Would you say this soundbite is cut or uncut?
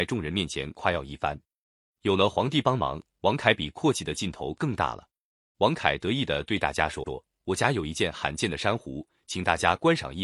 cut